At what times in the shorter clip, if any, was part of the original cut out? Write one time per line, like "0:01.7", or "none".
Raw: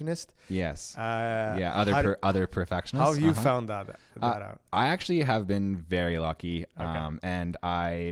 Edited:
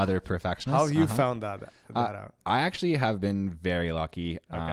none